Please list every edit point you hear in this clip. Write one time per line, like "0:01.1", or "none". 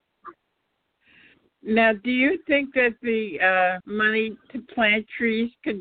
0:03.8

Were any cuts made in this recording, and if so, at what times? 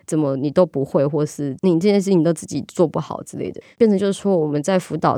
0:03.6

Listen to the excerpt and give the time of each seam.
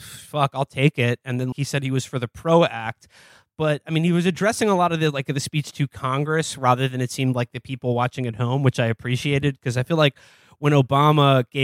0:01.5

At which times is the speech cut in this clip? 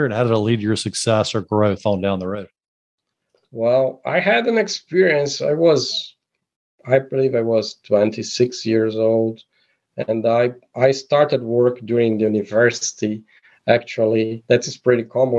none

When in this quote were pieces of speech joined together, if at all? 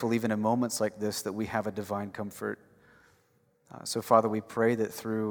none

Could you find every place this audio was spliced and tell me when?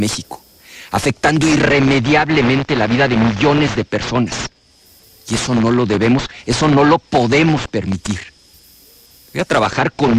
none

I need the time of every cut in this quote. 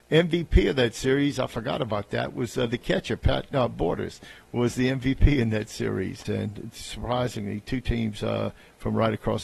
0:06.3

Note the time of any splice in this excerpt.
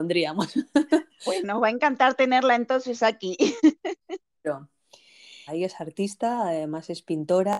0:05.5

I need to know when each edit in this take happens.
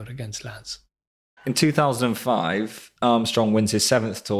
0:01.4
0:03.0

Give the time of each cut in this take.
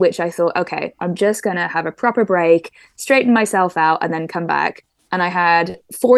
none

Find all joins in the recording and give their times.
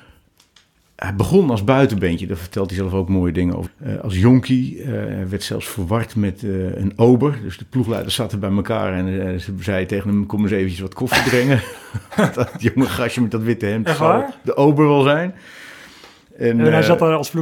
0:03.7

